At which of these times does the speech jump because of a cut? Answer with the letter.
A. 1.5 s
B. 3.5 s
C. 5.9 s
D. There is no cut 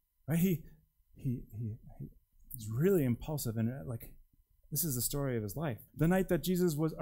C